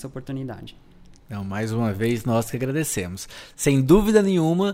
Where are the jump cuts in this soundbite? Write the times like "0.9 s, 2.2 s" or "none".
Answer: none